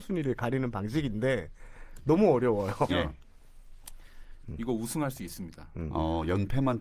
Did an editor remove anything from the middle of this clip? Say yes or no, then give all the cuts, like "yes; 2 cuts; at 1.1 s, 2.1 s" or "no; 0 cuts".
yes; 2 cuts; at 2.9 s, 4.4 s